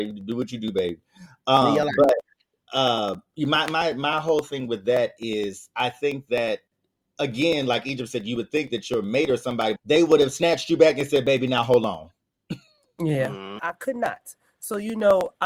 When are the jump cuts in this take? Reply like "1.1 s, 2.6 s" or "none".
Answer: 9.8 s, 13.6 s